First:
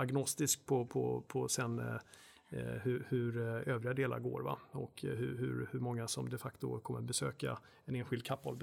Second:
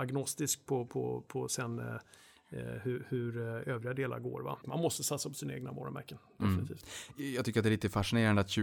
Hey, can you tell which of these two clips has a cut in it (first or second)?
second